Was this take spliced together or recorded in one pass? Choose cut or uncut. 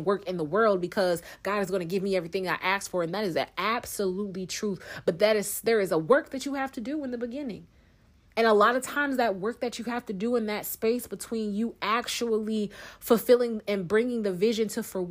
uncut